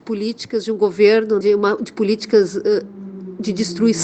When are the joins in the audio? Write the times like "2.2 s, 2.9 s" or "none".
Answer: 1.4 s